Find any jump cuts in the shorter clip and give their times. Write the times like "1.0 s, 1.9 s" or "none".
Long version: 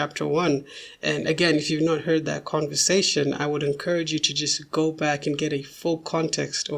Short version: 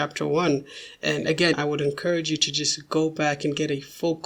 1.5 s